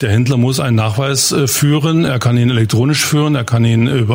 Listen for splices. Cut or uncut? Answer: uncut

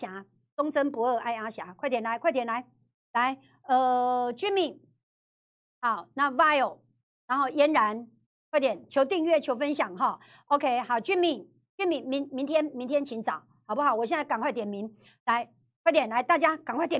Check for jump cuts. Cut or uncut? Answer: uncut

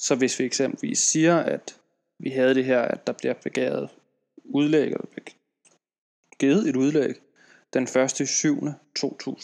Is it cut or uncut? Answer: uncut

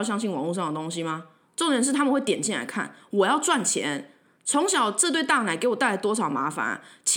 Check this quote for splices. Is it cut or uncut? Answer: cut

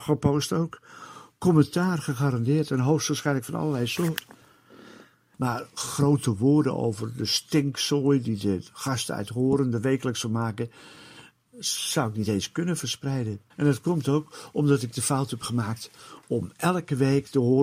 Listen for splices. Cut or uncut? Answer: cut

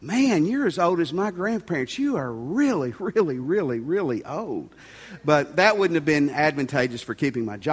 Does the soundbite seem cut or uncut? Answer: cut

